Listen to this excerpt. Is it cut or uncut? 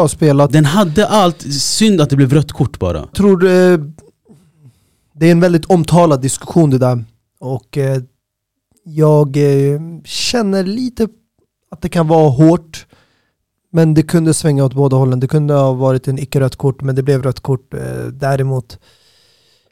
cut